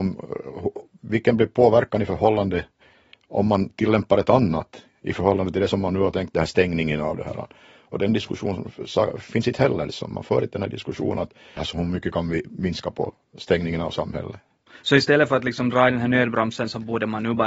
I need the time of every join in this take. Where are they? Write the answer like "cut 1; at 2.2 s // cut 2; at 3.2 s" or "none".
cut 1; at 11.6 s

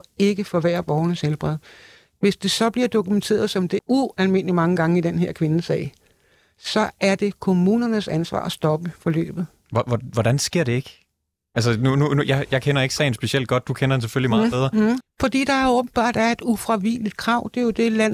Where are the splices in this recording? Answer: cut 1; at 3.8 s // cut 2; at 15.0 s

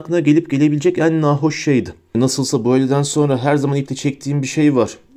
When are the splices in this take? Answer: cut 1; at 2.1 s

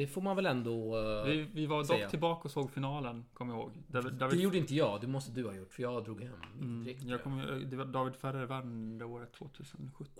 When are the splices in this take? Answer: none

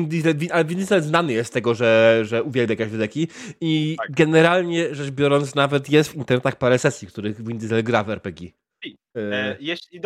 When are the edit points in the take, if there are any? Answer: none

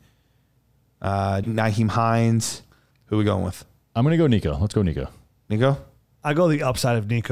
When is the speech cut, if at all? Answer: cut 1; at 1.4 s // cut 2; at 2.9 s

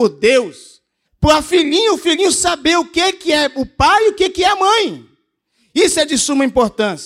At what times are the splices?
cut 1; at 1.0 s

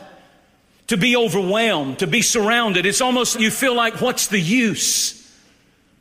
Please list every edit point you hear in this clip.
cut 1; at 3.3 s

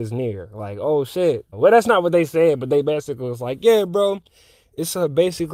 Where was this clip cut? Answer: cut 1; at 1.5 s

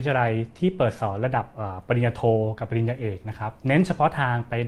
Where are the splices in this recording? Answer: cut 1; at 3.6 s

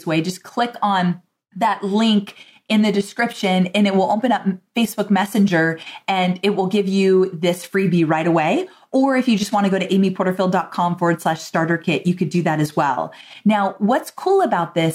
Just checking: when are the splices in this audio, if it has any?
none

